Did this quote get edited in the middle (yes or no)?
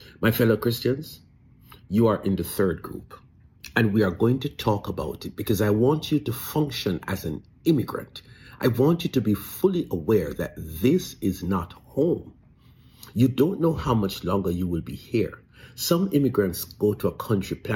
no